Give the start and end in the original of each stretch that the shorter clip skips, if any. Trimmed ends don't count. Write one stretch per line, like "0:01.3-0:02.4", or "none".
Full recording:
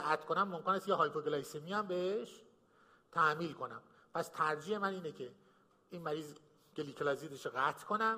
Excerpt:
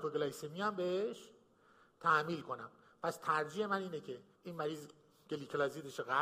0:05.4-0:05.8

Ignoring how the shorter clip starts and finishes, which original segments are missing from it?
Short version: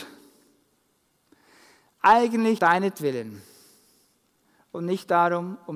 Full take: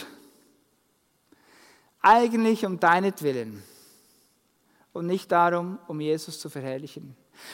0:02.6-0:02.8

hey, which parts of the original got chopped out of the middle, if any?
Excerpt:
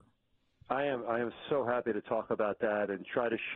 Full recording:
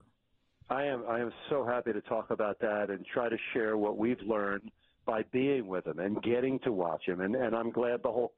none

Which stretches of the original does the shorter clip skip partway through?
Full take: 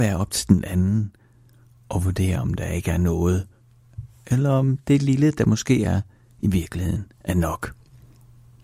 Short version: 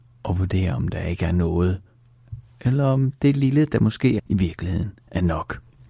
0:05.8-0:06.3

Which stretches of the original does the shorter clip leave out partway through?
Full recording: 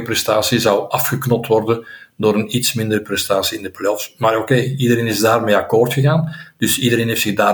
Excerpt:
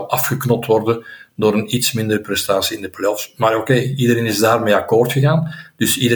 none

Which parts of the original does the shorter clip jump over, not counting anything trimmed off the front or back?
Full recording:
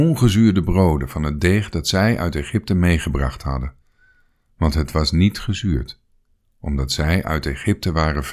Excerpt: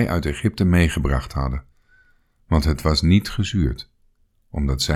none

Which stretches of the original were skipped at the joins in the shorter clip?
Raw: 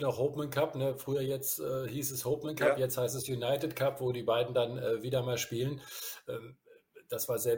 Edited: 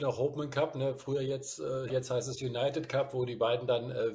0:01.9-0:02.8

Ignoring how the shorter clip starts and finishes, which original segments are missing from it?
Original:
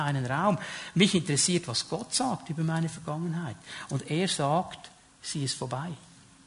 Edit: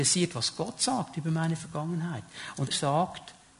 0:04.0-0:04.3

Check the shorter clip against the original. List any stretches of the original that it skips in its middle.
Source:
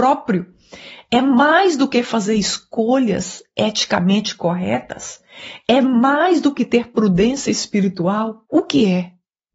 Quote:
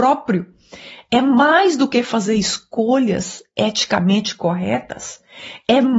none

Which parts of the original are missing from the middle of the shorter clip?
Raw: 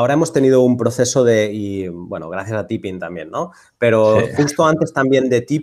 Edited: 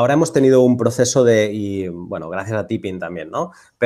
none

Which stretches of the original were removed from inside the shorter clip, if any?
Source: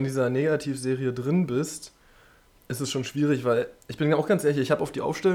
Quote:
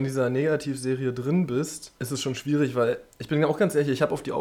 0:02.0-0:02.7

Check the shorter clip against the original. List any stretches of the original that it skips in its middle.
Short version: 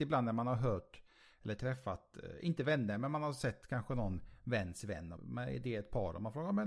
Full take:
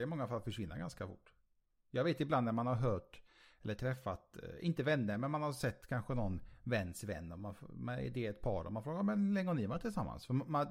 0:07.4-0:07.7

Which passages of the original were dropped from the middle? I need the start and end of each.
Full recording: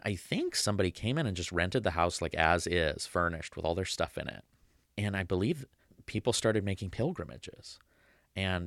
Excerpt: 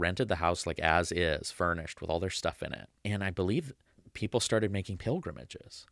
0:04.5-0:04.9

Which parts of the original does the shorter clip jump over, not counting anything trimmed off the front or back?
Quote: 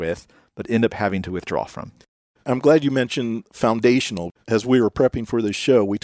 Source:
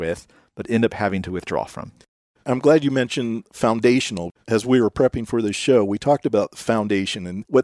none

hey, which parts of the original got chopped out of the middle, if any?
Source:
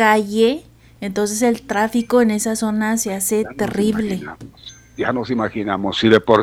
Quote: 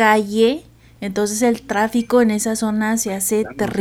none

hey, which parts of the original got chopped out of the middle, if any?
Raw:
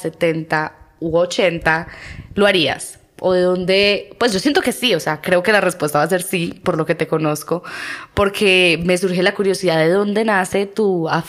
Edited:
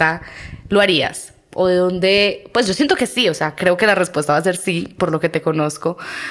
none

